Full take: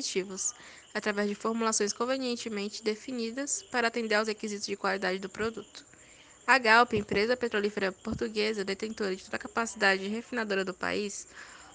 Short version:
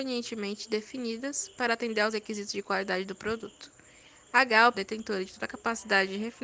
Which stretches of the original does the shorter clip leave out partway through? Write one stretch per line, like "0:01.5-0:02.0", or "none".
0:06.9-0:08.6